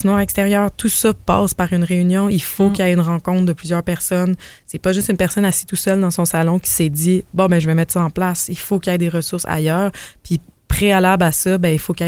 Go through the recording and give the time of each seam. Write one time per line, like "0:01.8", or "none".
none